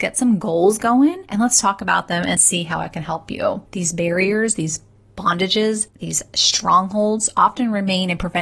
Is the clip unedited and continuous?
no; 2 cuts; at 2.4 s, 3.7 s

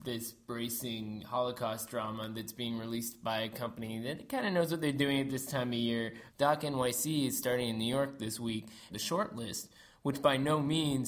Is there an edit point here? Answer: yes; 2 cuts; at 6.3 s, 8.9 s

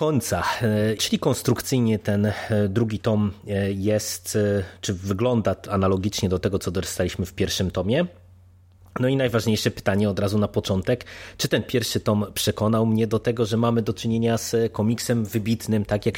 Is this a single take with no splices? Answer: no; 1 cut; at 1.0 s

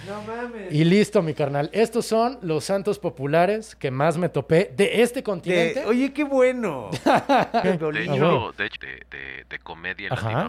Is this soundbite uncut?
no; 2 cuts; at 7.6 s, 8.8 s

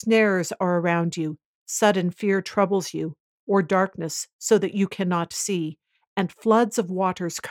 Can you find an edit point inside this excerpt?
no; 0 cuts

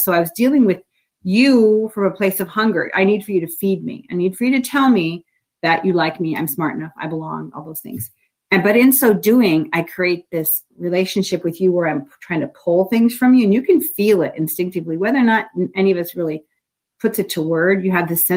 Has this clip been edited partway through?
no; 0 cuts

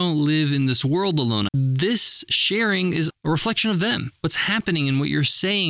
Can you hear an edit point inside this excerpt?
yes; 2 cuts; at 1.5 s, 3.1 s

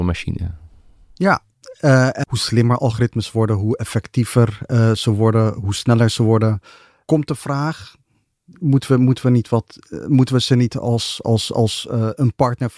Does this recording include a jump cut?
yes; 1 cut; at 2.2 s

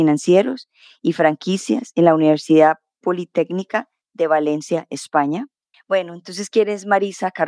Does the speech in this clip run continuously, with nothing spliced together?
no; 1 cut; at 5.7 s

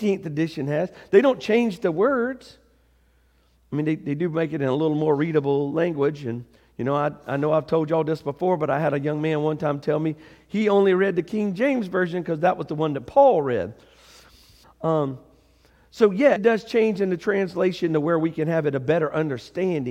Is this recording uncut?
no; 2 cuts; at 14.6 s, 16.4 s

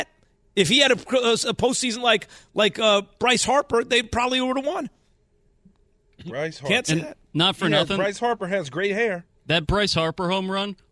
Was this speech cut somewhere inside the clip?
no; 0 cuts

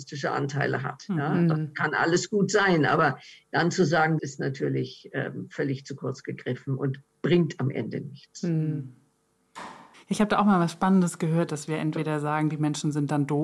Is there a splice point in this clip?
yes; 3 cuts; at 4.2 s, 9.9 s, 11.5 s

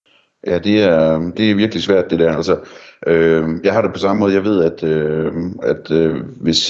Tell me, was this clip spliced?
yes; 1 cut; at 1.3 s

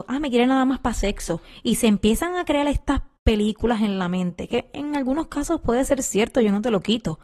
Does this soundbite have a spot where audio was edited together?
no; 0 cuts

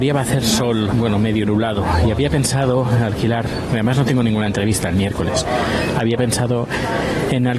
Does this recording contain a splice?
yes; 1 cut; at 0.9 s

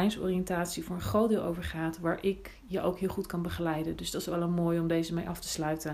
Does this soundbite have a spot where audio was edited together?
no; 0 cuts

